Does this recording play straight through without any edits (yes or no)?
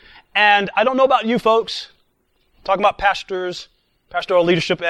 yes